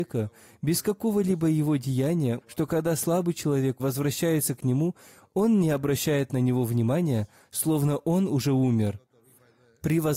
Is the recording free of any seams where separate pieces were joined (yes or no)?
no